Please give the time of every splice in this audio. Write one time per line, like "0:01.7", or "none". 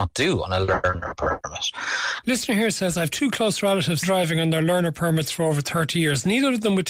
0:02.2
0:04.0